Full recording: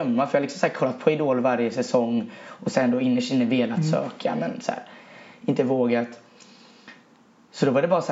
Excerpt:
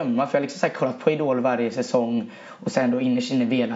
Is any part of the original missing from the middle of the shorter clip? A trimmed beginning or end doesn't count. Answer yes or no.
no